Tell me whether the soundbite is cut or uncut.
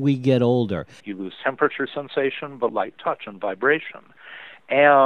cut